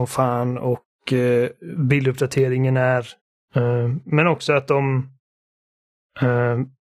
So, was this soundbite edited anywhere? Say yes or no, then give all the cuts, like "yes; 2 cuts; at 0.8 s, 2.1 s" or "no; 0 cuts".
yes; 1 cut; at 3.5 s